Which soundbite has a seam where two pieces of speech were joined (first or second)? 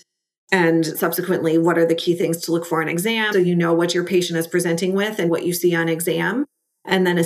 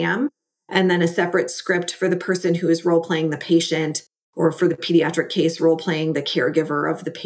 first